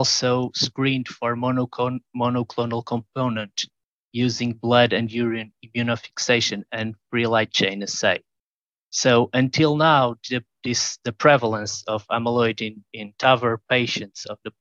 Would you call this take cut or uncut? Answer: uncut